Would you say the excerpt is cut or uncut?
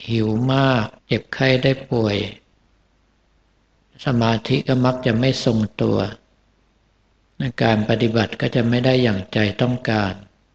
cut